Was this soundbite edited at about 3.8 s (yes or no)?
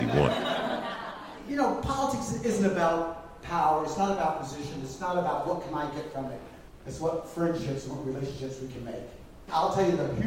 no